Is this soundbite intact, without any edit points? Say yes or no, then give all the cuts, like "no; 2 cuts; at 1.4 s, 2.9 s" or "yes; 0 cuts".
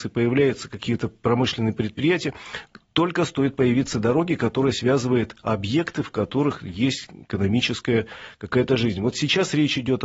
yes; 0 cuts